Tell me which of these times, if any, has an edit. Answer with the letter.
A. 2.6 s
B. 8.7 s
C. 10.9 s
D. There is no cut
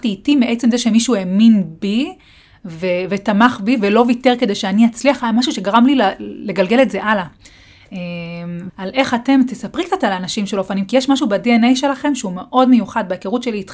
B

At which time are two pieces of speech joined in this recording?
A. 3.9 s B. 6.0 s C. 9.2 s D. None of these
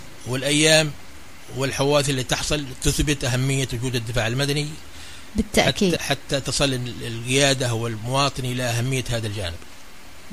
B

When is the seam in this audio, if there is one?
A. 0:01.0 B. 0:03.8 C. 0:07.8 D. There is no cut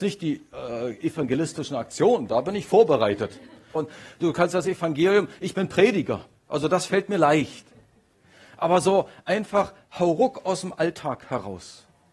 B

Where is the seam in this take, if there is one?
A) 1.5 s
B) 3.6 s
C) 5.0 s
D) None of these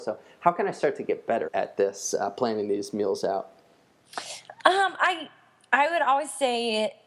A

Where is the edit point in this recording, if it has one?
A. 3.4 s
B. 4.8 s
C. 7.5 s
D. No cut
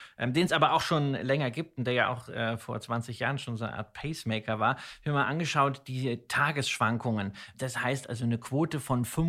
C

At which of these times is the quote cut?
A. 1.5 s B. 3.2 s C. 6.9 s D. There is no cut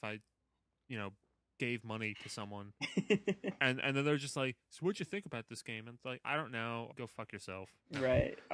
C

